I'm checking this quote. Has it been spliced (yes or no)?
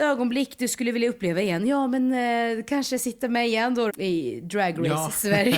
yes